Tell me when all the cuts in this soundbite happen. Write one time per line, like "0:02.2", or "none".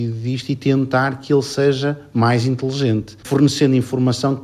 0:03.2